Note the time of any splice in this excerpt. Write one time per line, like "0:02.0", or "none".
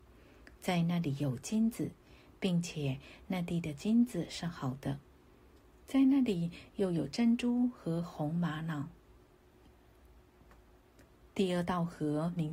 none